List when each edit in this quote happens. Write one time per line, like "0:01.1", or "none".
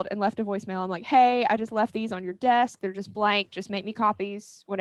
none